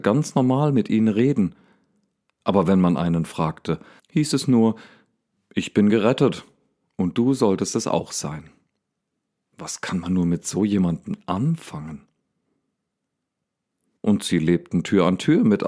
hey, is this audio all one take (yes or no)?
no